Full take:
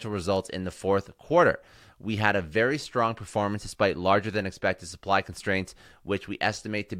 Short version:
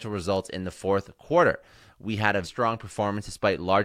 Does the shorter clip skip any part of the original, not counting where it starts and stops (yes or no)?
yes